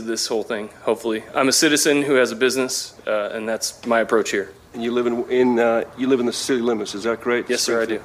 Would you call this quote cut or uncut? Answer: uncut